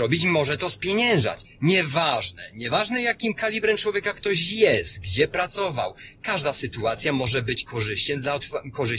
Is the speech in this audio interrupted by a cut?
yes; 1 cut; at 1.5 s

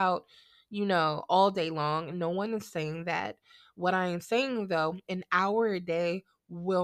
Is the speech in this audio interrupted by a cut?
no; 0 cuts

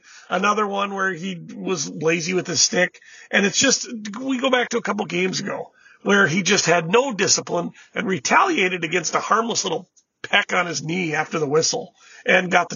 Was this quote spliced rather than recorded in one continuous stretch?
no; 0 cuts

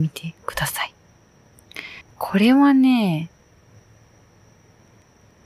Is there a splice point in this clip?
yes; 1 cut; at 2.0 s

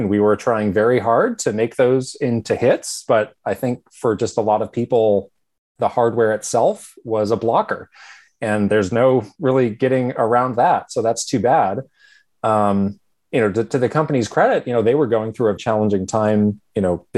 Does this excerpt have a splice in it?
yes; 1 cut; at 15.6 s

